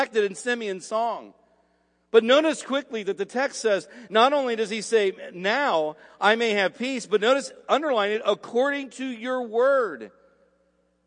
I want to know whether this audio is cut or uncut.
uncut